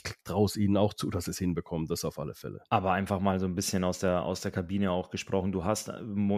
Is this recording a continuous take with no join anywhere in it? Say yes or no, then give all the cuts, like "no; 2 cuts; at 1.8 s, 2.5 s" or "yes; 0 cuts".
yes; 0 cuts